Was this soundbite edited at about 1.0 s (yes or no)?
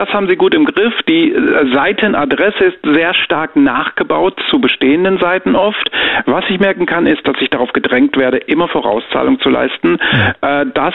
no